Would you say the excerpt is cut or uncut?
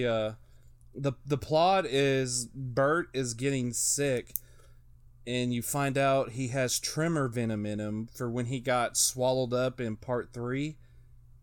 uncut